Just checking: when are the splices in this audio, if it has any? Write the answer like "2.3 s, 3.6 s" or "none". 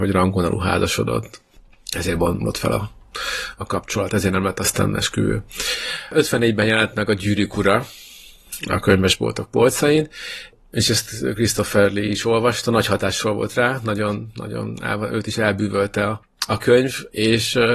2.4 s